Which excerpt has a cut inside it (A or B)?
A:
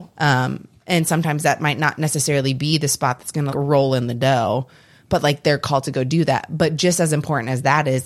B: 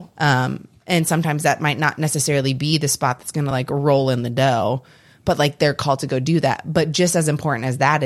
A